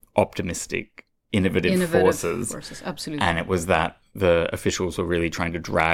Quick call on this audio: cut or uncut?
uncut